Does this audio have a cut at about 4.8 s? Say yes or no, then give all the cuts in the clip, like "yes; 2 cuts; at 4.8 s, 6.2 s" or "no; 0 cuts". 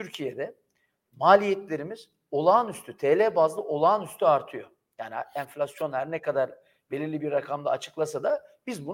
no; 0 cuts